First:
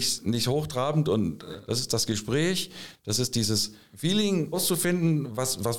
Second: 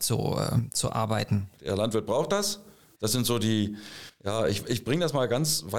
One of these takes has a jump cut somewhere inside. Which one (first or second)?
second